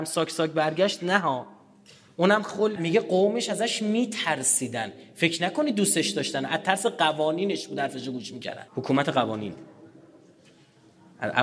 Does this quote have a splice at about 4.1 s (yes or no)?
no